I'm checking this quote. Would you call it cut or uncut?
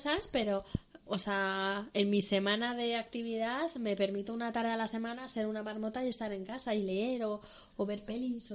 uncut